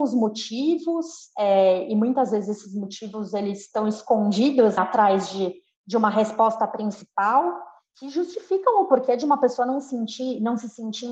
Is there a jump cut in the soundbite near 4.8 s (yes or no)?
yes